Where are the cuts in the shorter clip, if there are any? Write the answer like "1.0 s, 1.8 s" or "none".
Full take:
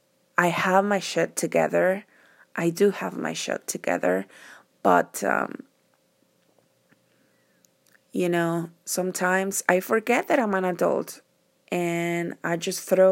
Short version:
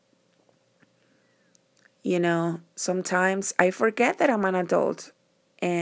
none